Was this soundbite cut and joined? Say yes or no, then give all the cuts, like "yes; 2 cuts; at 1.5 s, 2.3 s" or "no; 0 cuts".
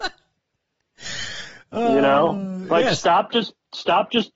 no; 0 cuts